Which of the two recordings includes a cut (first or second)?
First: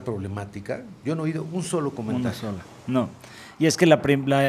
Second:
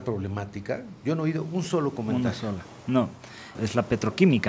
second